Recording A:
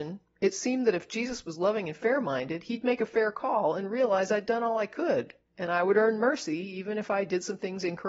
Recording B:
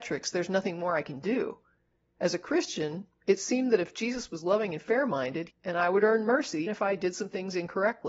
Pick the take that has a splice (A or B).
B